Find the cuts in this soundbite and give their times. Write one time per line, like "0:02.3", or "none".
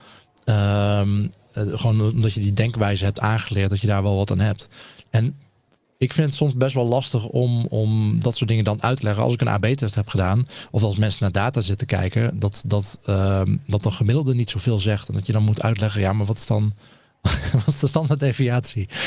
none